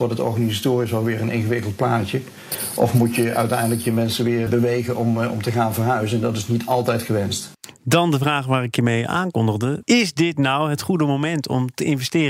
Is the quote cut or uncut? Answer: cut